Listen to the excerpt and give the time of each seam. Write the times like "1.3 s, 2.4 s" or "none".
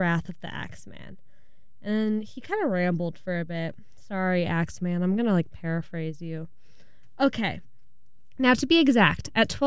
none

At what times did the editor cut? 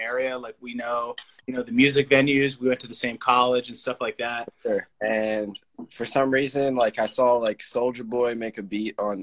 4.9 s

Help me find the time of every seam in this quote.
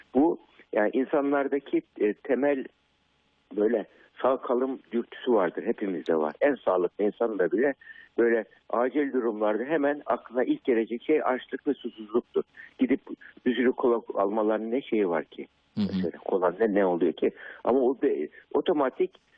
none

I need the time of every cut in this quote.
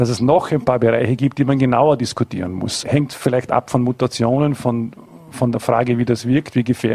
2.8 s

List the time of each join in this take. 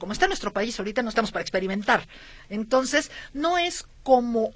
none

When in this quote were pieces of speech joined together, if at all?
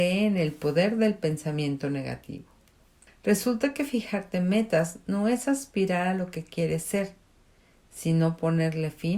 3.1 s

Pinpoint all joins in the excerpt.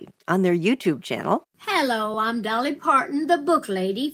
none

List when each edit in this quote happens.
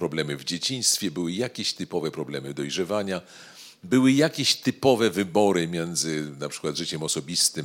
none

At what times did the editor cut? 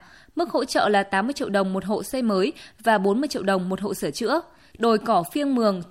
4.7 s

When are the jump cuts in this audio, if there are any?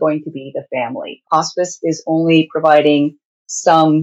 1.2 s

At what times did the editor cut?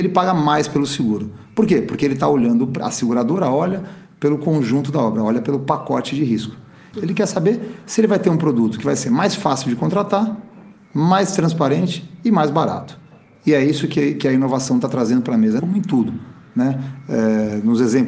6.9 s, 15.6 s

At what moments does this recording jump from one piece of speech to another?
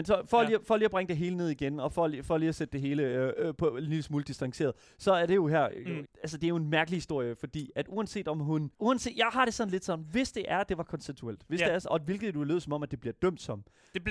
6.1 s, 8.7 s

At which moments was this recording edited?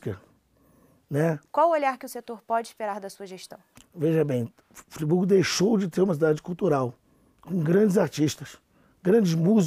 1.5 s, 3.8 s

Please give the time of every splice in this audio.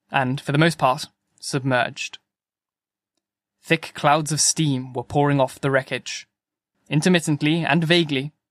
6.7 s

